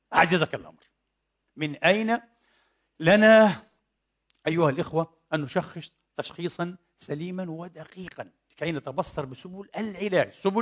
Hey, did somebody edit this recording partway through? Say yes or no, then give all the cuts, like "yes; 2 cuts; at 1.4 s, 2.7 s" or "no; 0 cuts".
yes; 1 cut; at 1.5 s